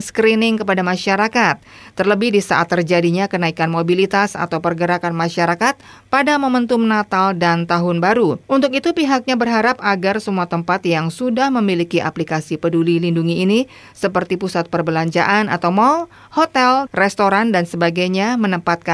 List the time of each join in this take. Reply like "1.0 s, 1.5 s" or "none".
8.4 s, 16.9 s